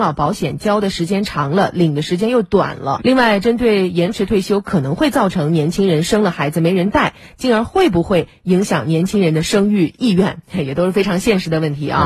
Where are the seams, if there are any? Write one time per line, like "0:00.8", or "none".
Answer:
0:03.0